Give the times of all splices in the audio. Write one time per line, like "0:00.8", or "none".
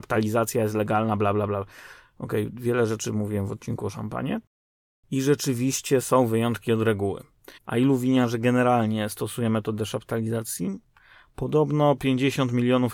0:07.6